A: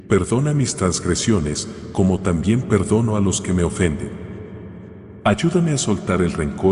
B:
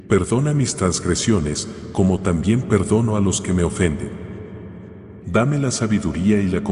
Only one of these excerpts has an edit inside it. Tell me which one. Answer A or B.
B